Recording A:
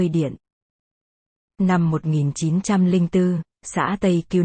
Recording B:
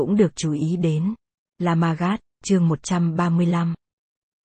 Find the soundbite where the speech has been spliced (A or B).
B